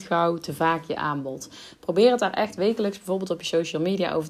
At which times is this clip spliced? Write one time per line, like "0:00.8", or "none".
none